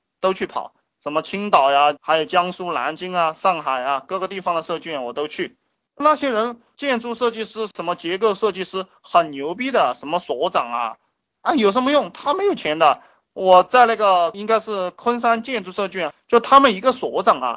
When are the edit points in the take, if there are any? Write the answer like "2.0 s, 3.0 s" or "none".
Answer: 2.0 s